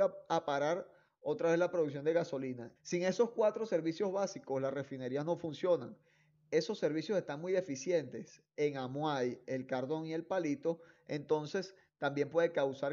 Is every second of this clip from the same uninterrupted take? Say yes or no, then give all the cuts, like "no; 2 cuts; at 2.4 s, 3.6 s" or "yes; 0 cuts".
no; 1 cut; at 2.8 s